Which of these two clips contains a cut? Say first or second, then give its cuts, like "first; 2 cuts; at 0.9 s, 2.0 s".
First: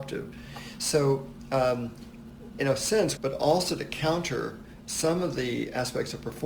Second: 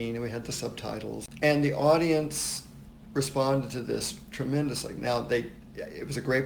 first; 1 cut; at 3.2 s